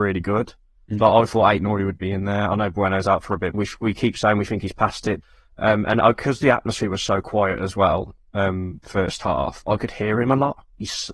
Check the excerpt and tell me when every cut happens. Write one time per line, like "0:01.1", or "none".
0:03.5
0:05.2